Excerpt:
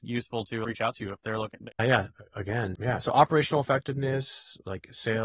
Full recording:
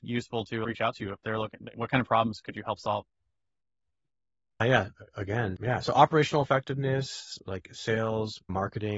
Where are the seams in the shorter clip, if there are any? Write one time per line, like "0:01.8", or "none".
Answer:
0:01.7